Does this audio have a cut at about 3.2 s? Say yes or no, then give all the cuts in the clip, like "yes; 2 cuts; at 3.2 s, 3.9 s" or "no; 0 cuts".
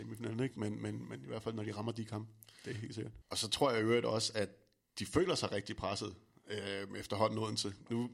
yes; 1 cut; at 3.2 s